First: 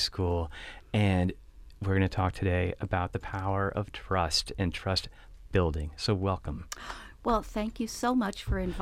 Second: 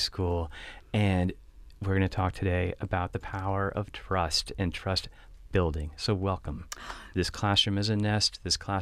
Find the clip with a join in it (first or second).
second